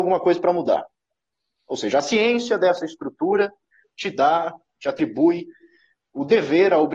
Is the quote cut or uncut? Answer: uncut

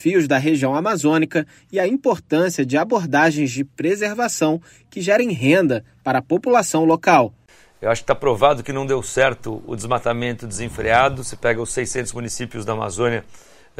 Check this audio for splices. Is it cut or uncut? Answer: uncut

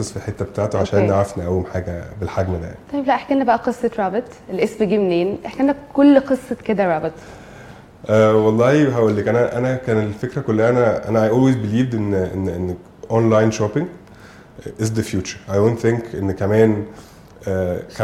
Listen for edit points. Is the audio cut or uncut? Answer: uncut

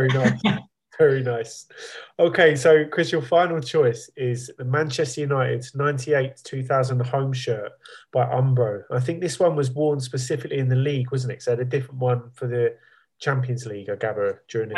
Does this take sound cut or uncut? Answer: uncut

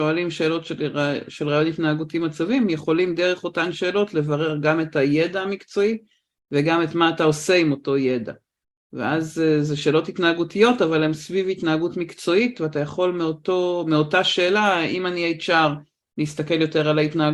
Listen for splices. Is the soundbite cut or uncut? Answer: uncut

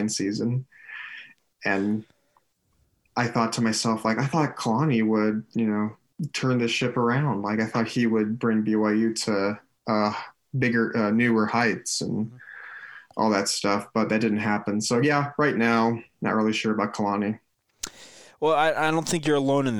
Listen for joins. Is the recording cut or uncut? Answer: uncut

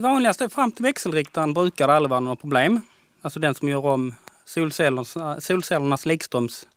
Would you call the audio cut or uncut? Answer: uncut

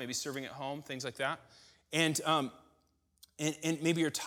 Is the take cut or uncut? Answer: uncut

